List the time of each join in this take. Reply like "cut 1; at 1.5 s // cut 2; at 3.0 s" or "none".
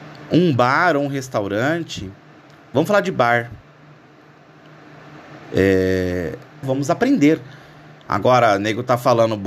cut 1; at 6.6 s